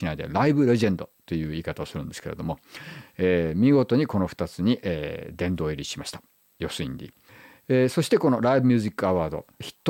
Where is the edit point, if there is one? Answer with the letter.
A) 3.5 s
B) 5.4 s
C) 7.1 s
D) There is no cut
D